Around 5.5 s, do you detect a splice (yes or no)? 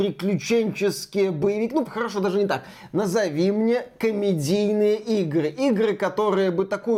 no